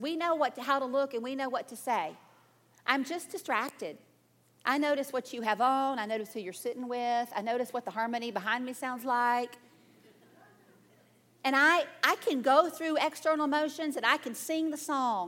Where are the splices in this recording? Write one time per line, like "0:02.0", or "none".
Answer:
0:02.7